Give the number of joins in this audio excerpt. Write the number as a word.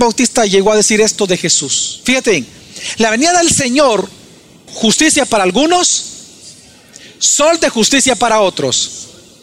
one